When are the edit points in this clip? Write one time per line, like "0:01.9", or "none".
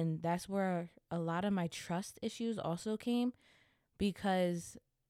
none